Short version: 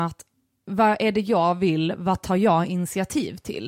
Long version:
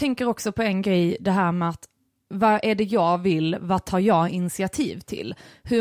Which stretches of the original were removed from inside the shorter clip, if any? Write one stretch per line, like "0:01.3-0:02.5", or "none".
none